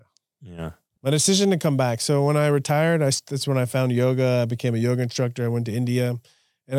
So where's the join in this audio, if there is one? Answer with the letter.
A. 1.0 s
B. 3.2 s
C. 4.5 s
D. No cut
A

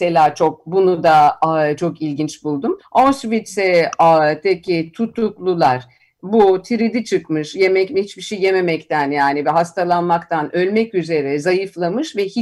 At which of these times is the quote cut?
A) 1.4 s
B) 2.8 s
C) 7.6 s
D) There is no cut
B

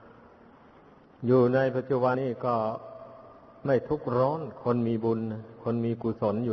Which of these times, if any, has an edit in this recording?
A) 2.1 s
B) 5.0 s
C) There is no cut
A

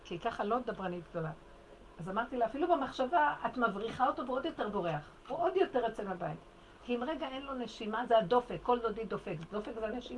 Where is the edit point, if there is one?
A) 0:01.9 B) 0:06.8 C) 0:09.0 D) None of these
B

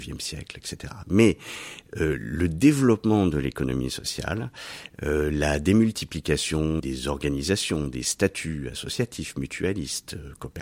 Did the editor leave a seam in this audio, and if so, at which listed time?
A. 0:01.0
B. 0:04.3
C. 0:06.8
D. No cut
C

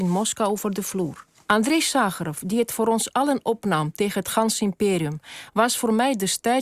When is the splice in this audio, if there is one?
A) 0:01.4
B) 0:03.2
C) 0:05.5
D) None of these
A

